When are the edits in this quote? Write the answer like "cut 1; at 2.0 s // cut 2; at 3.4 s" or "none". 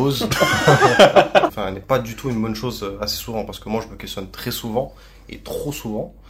cut 1; at 1.5 s